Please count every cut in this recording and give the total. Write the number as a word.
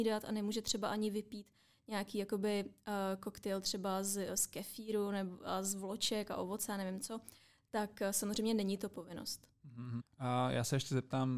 one